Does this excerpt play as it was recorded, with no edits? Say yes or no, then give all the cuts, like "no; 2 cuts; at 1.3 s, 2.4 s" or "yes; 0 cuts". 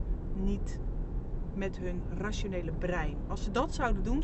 yes; 0 cuts